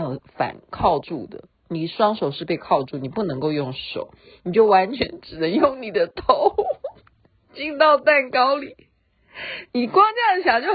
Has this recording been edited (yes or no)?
no